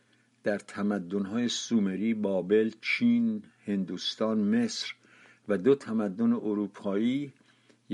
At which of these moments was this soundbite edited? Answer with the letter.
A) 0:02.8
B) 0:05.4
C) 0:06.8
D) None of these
D